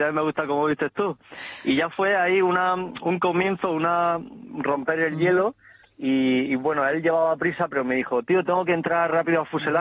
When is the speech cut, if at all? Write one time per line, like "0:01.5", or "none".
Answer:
none